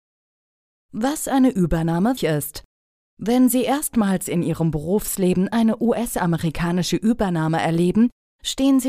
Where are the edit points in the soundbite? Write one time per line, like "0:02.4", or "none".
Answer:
0:02.2

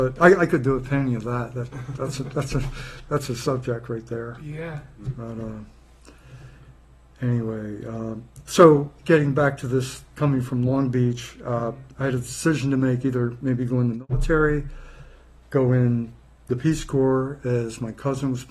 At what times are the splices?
none

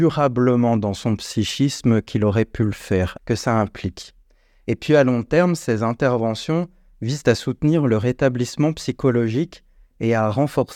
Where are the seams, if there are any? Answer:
0:03.2

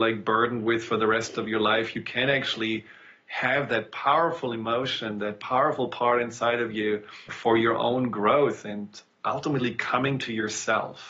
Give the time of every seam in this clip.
0:07.3

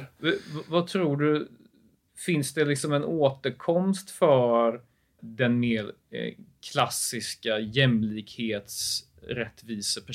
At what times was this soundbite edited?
0:05.2

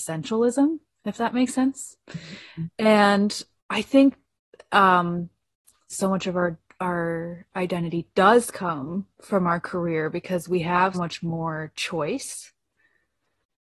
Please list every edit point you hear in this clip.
0:05.9
0:10.9

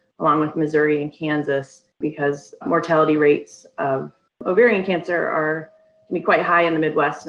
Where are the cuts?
none

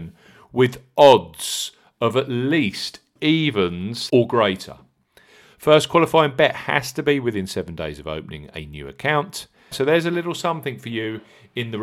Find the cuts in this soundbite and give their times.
0:04.1
0:09.7

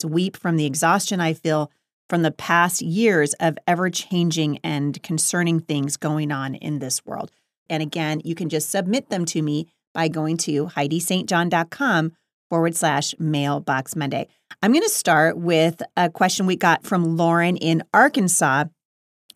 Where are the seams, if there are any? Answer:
0:07.7

